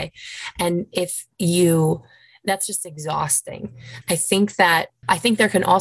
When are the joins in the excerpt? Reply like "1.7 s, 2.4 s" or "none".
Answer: 4.0 s